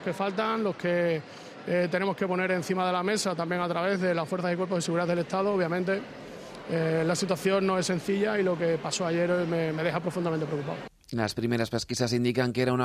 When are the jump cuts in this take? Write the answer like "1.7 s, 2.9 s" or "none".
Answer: none